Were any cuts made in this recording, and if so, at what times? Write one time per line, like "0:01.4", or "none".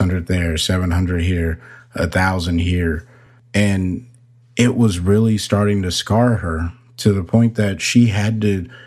none